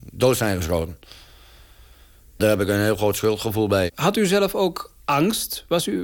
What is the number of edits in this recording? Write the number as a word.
one